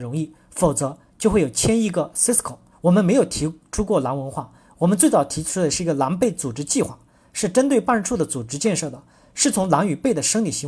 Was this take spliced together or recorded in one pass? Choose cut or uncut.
cut